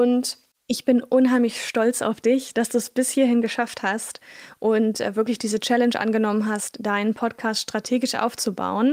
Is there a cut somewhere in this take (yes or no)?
no